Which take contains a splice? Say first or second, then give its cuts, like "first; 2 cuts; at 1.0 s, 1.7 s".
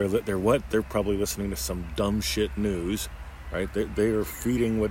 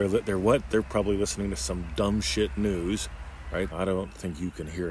second; 1 cut; at 3.7 s